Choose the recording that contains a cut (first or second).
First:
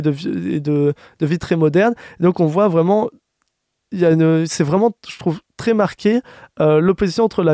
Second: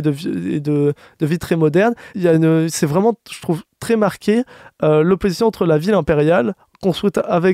second